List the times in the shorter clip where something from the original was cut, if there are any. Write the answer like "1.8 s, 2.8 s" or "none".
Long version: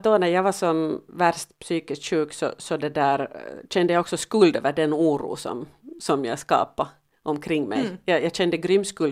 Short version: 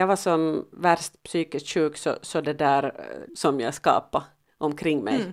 3.3 s